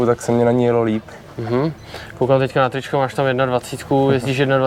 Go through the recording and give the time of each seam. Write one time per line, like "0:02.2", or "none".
none